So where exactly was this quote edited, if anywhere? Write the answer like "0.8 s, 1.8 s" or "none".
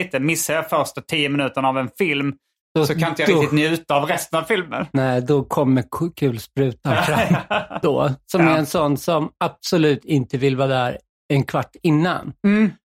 7.8 s